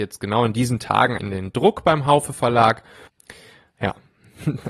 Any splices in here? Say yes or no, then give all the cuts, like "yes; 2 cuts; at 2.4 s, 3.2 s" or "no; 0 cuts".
yes; 2 cuts; at 1.2 s, 3.1 s